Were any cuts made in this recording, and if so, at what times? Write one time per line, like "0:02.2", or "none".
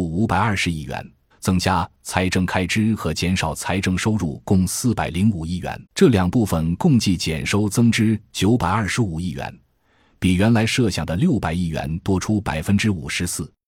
0:01.3
0:05.9